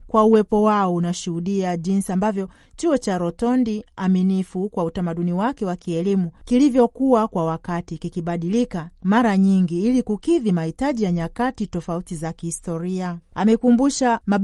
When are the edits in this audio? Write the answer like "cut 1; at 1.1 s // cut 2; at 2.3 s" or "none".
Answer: none